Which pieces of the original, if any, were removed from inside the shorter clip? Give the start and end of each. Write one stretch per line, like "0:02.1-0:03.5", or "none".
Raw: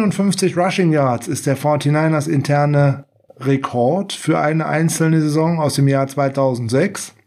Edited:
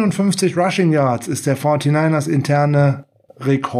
none